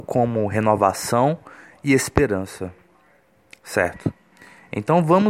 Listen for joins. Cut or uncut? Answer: uncut